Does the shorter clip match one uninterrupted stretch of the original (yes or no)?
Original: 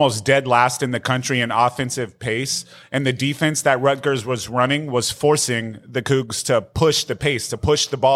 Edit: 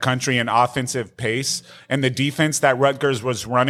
yes